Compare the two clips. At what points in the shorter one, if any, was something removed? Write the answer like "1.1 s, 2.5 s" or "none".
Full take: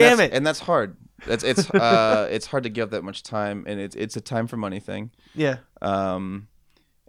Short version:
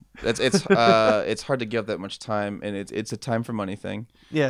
none